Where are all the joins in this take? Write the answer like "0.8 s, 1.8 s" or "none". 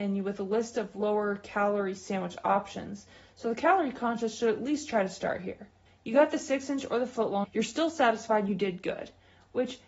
5.9 s, 7.4 s

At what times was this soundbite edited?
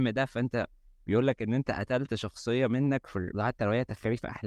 3.3 s

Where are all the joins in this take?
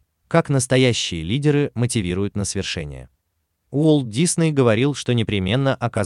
3.5 s

